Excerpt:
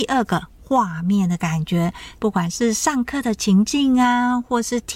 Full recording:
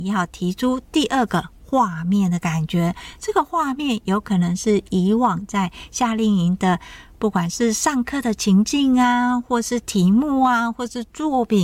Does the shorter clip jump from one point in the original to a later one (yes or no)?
yes